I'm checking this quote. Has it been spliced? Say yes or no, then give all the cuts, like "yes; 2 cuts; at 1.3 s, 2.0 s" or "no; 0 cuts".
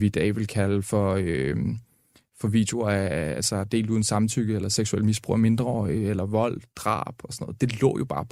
no; 0 cuts